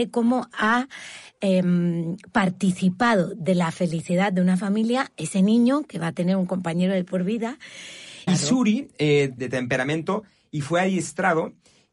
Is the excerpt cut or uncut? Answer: cut